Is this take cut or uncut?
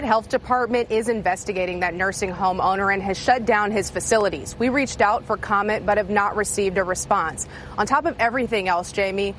uncut